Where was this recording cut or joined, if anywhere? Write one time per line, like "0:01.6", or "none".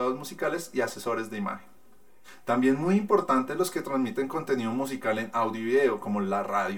none